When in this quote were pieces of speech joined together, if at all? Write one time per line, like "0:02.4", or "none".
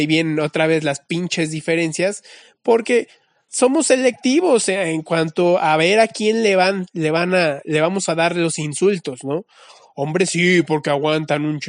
0:03.5